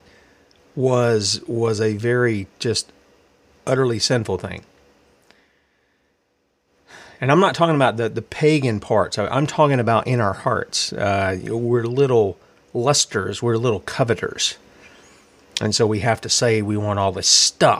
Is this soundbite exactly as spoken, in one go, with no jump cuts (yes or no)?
yes